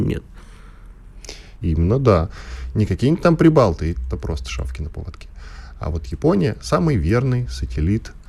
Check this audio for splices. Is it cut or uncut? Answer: cut